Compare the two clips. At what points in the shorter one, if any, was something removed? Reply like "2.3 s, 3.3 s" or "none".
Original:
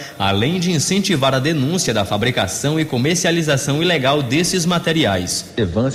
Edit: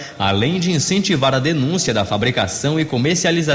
none